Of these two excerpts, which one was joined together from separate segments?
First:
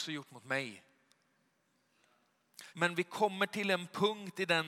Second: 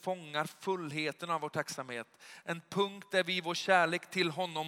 first; 1 cut; at 2.7 s

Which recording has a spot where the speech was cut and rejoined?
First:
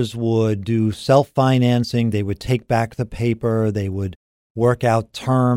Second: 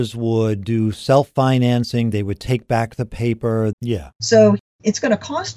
second; 1 cut; at 3.7 s

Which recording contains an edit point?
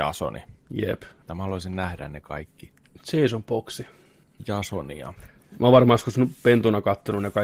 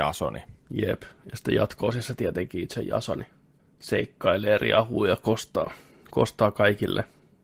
first; 1 cut; at 1.2 s

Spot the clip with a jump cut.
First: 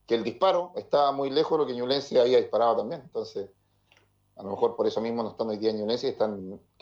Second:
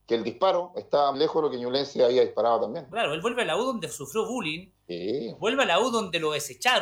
second; 2 cuts; at 1.1 s, 2.9 s

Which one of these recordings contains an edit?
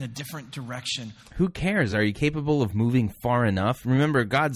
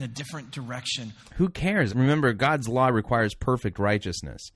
second; 1 cut; at 1.9 s

